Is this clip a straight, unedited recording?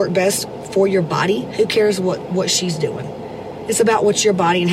yes; 0 cuts

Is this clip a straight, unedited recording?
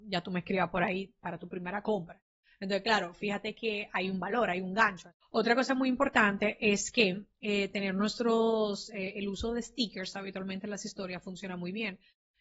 no; 1 cut; at 5.2 s

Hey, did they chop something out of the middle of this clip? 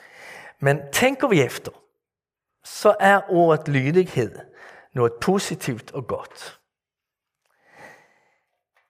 no; 0 cuts

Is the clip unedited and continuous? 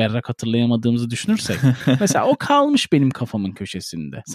yes; 0 cuts

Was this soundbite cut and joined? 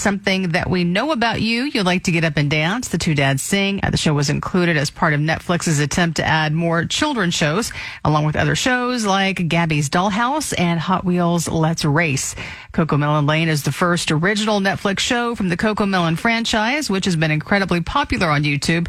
yes; 1 cut; at 3.8 s

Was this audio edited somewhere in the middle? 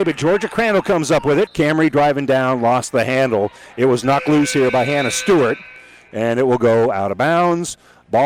yes; 1 cut; at 1.5 s

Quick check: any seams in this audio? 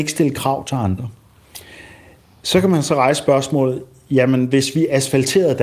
no; 0 cuts

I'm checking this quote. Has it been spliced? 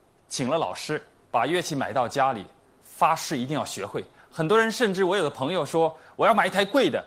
yes; 1 cut; at 1.2 s

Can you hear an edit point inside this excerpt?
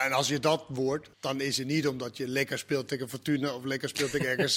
yes; 1 cut; at 1.1 s

